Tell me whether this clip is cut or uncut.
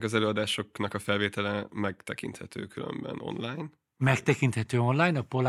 uncut